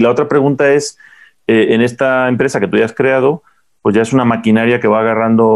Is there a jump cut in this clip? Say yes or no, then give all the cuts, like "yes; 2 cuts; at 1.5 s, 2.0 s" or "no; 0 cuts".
no; 0 cuts